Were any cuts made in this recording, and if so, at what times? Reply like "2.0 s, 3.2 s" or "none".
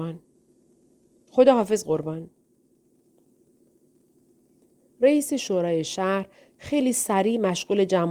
1.1 s